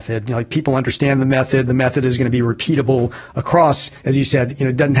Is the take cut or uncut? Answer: uncut